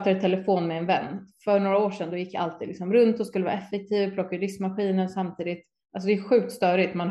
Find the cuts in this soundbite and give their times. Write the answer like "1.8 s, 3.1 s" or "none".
none